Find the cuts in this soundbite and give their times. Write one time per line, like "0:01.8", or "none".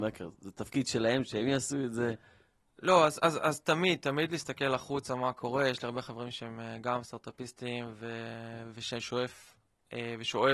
none

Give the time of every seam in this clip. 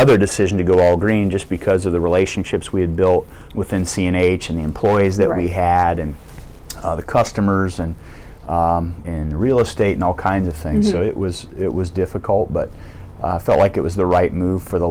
0:09.0

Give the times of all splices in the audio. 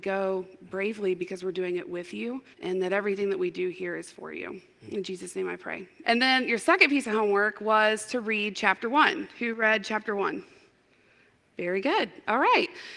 0:02.5
0:06.0

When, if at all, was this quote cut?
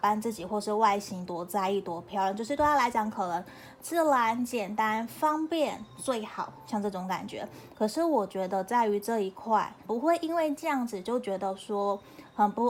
0:07.7
0:09.9

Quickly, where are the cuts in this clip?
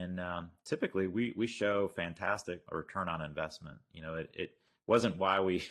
none

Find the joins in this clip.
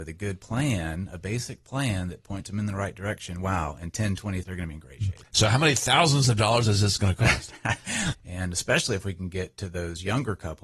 0:04.4
0:08.1

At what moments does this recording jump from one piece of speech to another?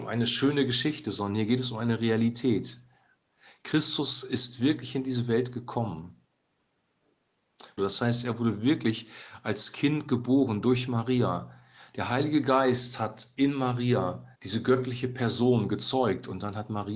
0:07.8
0:14.3

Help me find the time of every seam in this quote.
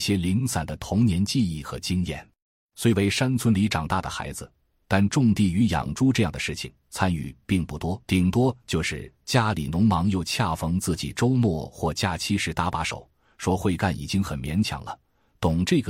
0:02.6
0:08.0

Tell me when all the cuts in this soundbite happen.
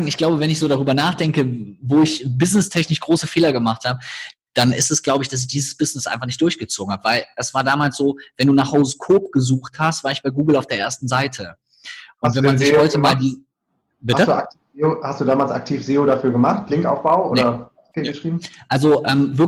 none

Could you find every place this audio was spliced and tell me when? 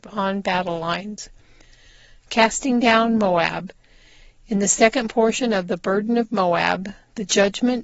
none

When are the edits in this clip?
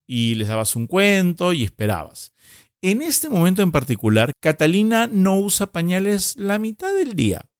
0:04.3

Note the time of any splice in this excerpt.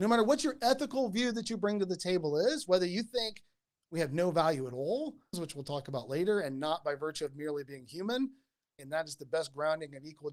0:05.3
0:08.8

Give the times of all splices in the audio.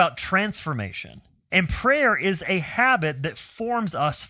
0:01.5

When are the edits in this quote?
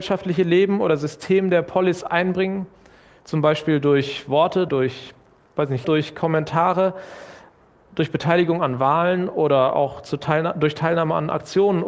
0:04.7
0:05.8

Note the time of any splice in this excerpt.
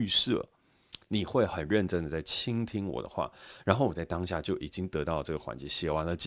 none

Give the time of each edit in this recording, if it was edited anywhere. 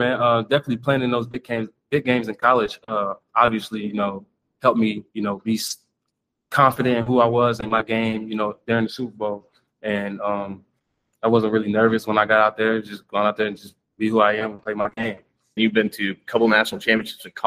0:15.6

